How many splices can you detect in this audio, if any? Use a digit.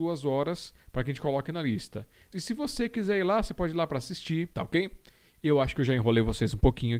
2